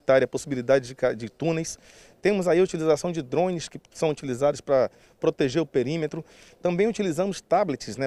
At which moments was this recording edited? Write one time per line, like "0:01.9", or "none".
none